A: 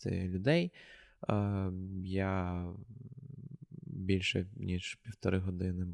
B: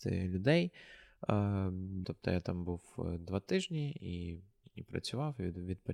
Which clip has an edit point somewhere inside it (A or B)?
B